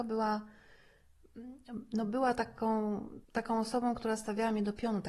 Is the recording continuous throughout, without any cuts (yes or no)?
no